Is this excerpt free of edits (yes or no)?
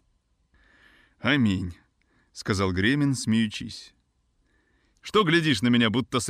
no